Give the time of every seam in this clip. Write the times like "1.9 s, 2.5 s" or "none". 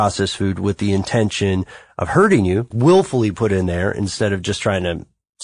2.7 s